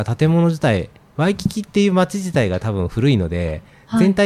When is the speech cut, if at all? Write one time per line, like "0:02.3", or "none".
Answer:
none